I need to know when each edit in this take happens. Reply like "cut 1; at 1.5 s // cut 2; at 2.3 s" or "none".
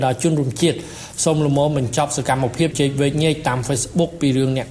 cut 1; at 2.7 s